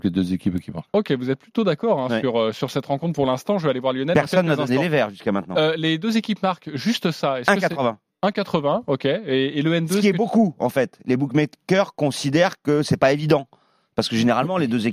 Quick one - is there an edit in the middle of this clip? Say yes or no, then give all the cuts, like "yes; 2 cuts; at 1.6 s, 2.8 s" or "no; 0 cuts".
no; 0 cuts